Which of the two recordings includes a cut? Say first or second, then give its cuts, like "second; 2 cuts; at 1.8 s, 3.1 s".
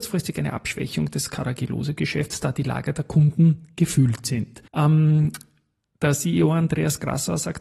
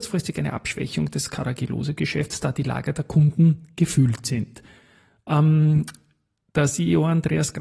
first; 1 cut; at 4.7 s